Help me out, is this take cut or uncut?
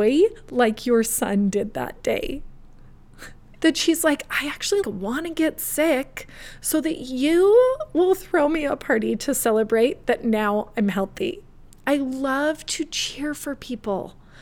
cut